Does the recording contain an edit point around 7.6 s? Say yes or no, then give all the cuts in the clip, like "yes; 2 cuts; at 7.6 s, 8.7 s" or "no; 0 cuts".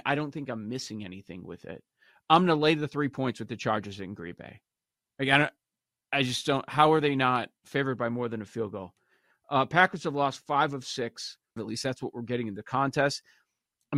yes; 2 cuts; at 7.6 s, 11.6 s